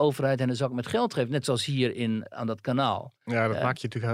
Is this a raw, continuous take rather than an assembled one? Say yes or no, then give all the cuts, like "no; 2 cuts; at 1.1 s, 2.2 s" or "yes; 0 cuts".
no; 1 cut; at 2.3 s